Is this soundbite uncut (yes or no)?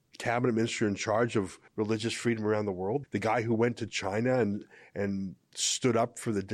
no